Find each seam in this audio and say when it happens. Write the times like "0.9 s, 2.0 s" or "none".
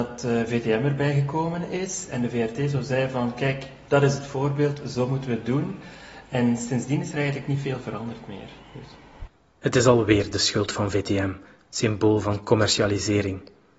none